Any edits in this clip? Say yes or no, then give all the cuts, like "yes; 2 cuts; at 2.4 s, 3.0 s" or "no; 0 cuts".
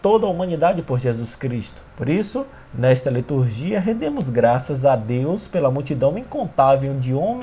yes; 1 cut; at 1.9 s